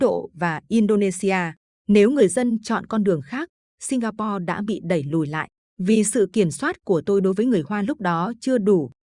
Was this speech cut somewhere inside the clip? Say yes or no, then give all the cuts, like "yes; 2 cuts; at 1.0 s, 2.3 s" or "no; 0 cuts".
yes; 2 cuts; at 1.8 s, 5.6 s